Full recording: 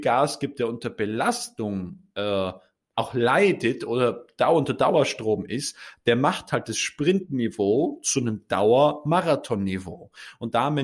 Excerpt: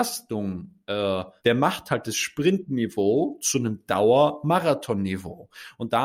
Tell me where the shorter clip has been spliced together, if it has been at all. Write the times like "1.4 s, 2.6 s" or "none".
1.4 s

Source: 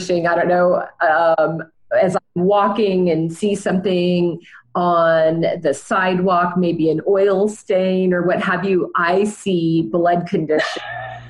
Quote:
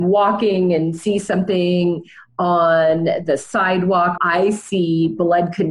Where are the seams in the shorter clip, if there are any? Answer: 4.2 s

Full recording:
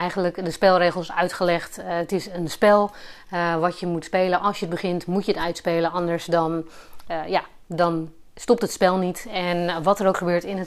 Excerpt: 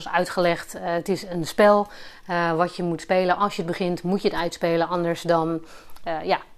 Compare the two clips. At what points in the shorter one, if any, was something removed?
none

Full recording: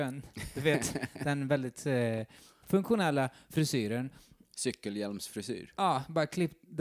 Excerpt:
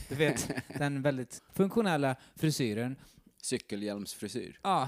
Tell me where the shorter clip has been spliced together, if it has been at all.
1.4 s

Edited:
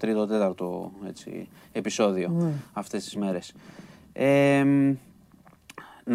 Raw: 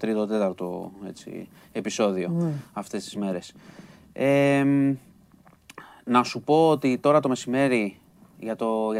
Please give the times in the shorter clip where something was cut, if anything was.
none

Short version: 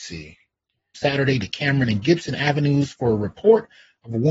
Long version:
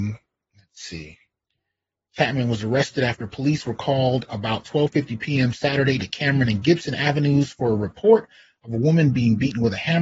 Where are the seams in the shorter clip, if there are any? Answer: 0.9 s

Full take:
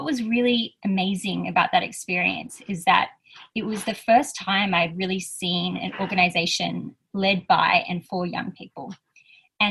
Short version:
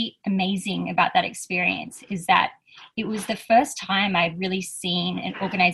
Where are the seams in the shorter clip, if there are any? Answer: none

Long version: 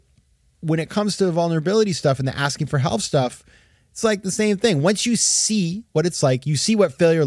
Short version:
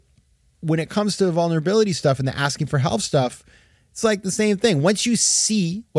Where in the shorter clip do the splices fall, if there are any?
none

